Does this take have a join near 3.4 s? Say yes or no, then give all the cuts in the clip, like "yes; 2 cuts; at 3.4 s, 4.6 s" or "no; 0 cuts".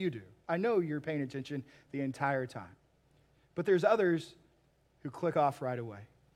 no; 0 cuts